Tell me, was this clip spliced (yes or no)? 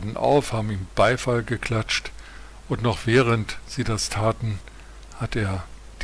no